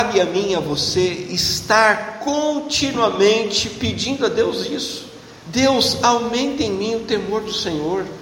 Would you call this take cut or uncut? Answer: uncut